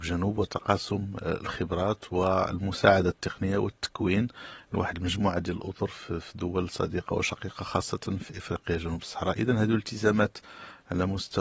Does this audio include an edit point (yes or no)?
no